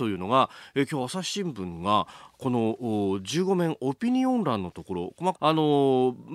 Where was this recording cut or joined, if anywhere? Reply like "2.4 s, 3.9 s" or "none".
5.3 s